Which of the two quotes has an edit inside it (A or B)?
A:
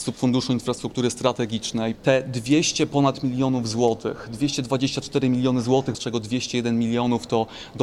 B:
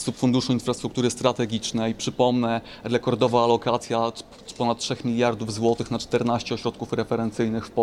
A